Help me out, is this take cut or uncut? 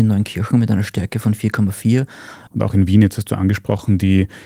cut